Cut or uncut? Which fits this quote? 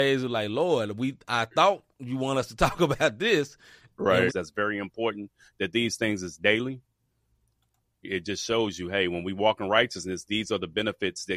cut